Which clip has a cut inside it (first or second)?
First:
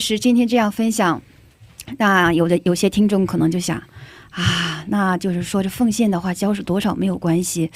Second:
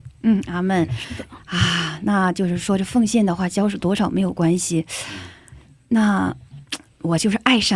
second